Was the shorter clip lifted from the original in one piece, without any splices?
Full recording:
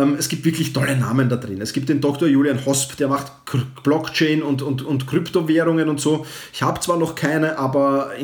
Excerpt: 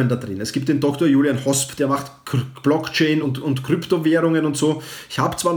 no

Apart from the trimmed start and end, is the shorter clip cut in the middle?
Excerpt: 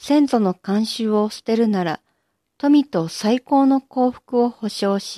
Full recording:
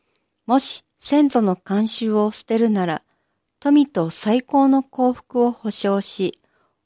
no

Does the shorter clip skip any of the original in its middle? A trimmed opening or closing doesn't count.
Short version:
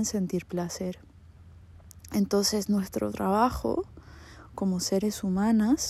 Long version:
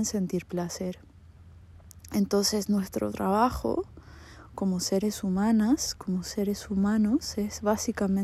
no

